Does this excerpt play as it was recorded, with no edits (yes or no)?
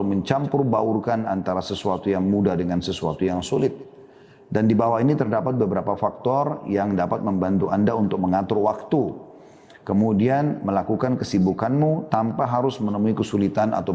yes